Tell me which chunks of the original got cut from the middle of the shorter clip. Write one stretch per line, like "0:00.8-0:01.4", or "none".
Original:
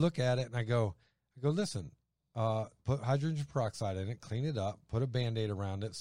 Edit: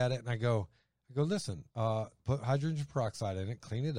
0:02.0-0:02.3